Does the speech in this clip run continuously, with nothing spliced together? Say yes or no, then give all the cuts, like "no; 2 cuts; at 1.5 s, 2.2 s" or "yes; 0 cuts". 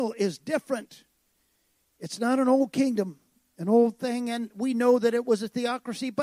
yes; 0 cuts